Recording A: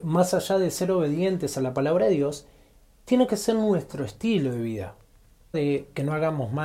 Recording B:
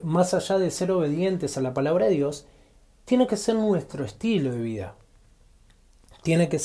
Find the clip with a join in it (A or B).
A